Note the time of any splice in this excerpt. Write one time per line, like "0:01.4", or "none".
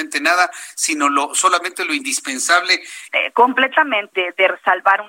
0:03.1
0:04.1